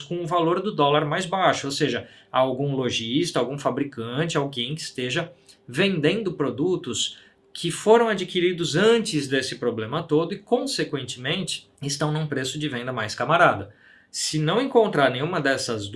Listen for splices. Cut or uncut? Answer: cut